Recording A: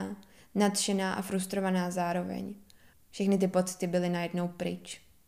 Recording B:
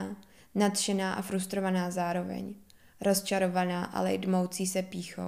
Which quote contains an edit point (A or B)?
A